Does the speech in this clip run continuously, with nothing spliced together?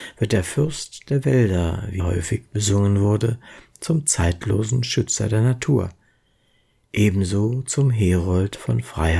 no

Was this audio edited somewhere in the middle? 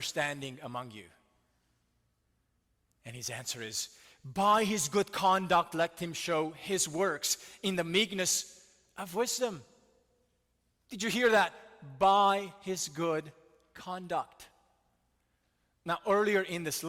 no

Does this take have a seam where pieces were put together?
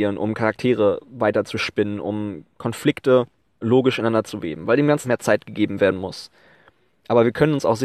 yes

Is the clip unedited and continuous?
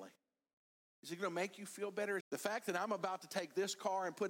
no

